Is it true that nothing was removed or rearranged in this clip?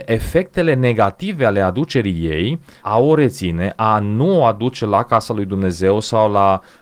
no; 1 cut; at 2.8 s

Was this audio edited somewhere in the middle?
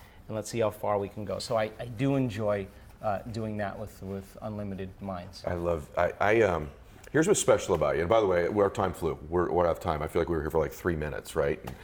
no; 0 cuts

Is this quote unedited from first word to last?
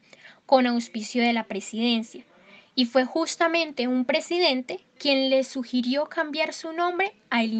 no; 1 cut; at 5.0 s

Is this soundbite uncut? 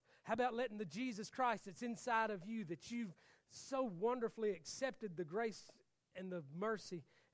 yes; 0 cuts

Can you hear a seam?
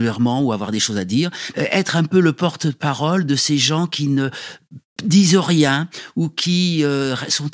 yes; 1 cut; at 1.5 s

